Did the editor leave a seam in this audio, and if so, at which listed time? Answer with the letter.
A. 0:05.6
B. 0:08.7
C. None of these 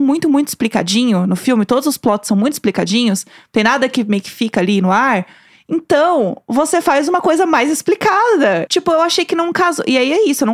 B